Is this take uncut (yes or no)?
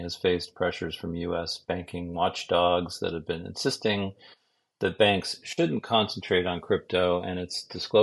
yes